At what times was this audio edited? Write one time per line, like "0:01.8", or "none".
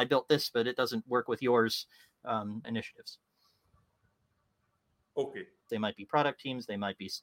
0:02.6
0:05.7

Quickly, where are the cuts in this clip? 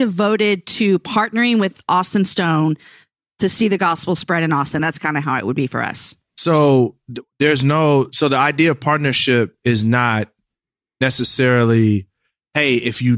none

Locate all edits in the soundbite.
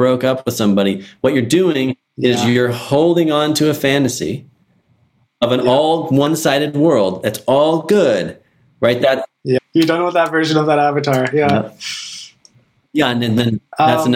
0:09.6

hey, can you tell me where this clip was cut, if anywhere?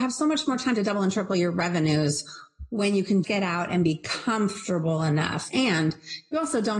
0:03.2
0:05.5

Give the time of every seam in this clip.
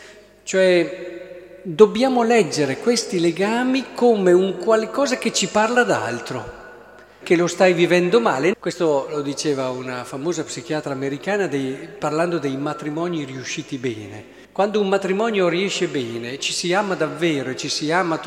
0:07.2
0:08.5
0:14.4

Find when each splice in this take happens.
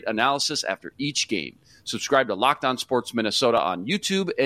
none

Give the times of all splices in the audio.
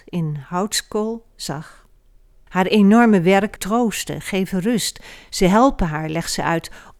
0:02.5
0:03.6

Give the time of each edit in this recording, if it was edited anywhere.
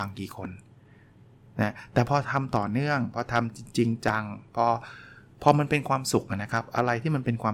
none

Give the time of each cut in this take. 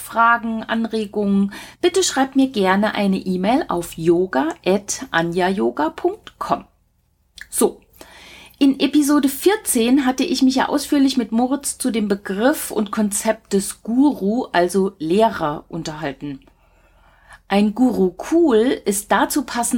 none

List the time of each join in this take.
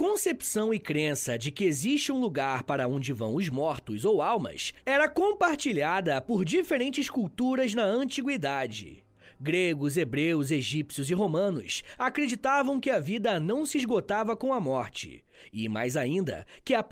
none

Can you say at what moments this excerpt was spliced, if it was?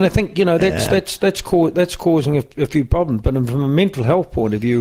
none

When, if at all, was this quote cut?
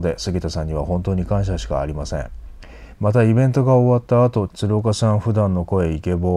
0:03.0
0:04.5

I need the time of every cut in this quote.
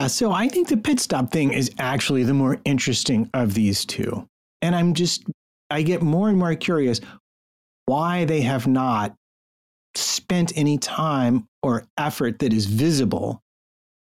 0:04.6

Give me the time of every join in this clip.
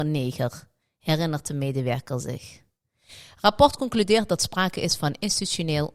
none

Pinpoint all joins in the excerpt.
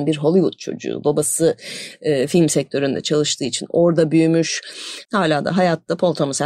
0:05.1

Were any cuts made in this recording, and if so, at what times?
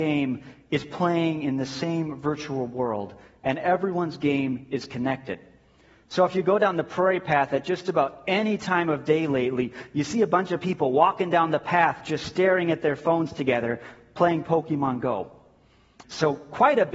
0:16.0

